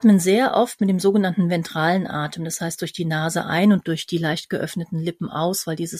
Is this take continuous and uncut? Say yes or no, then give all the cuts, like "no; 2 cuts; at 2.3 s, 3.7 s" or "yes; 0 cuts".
yes; 0 cuts